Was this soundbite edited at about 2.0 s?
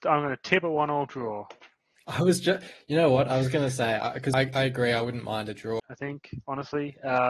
no; 2 cuts; at 4.3 s, 5.8 s

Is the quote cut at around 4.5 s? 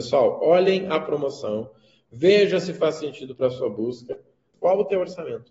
yes; 1 cut; at 4.5 s

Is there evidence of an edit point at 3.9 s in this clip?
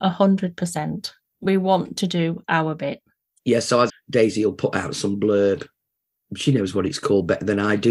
yes; 1 cut; at 3.9 s

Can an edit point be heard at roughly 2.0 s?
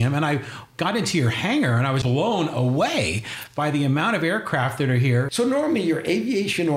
yes; 2 cuts; at 2.0 s, 5.3 s

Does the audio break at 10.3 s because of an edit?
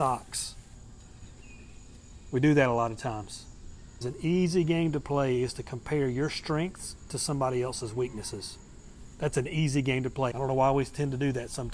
yes; 2 cuts; at 4.0 s, 10.3 s

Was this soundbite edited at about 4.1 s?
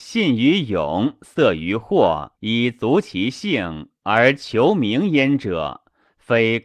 no; 1 cut; at 2.3 s

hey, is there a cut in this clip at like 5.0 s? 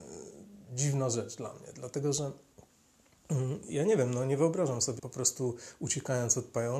yes; 1 cut; at 5.0 s

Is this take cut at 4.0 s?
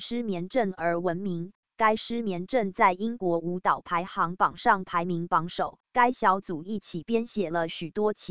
no; 1 cut; at 5.8 s

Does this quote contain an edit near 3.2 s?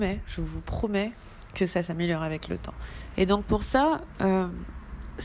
yes; 1 cut; at 3.2 s

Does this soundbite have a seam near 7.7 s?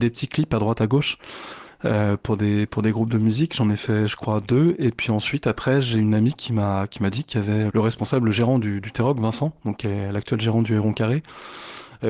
yes; 1 cut; at 7.7 s

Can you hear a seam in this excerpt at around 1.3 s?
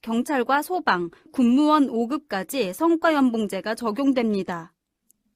yes; 1 cut; at 1.3 s

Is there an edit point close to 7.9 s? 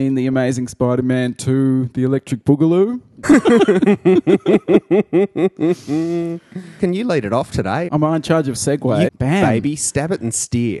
yes; 3 cuts; at 3.2 s, 7.9 s, 9.1 s

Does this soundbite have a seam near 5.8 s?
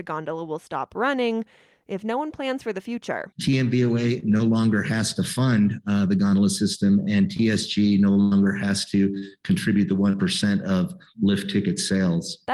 no; 1 cut; at 3.3 s

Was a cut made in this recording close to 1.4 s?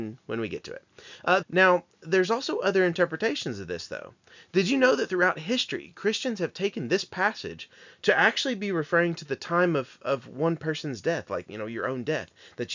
yes; 1 cut; at 1.4 s

